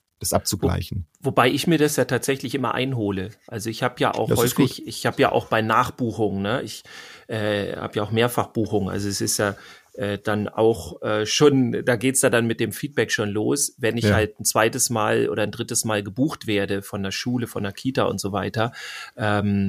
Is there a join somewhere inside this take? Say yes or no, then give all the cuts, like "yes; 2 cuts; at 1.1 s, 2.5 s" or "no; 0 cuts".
no; 0 cuts